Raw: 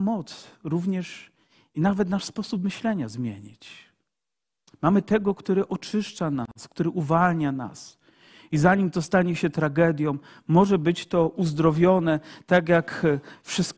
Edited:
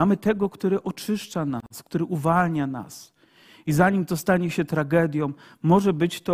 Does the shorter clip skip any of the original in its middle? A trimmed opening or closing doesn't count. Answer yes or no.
no